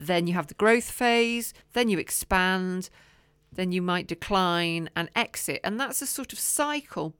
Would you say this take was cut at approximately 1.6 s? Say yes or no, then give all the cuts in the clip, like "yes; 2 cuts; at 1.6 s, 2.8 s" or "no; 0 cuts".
yes; 1 cut; at 1.6 s